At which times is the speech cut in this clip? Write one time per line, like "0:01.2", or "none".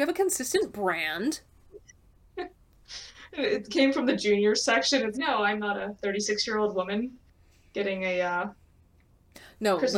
0:05.1